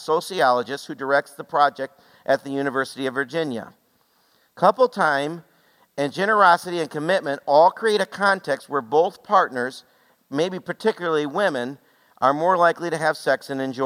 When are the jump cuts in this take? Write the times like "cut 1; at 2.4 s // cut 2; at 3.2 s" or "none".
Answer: none